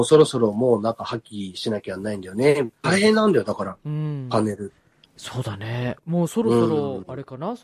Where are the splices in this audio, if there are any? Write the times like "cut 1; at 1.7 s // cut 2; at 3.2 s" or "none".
cut 1; at 2.8 s // cut 2; at 5.0 s